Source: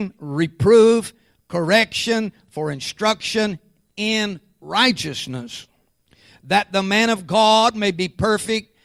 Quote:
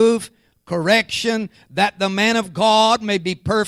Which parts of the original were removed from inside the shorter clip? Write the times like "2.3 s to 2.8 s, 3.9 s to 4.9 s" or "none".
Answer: 2.4 s to 6.3 s